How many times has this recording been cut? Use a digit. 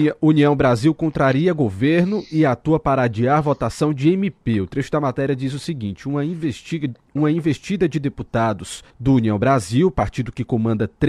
1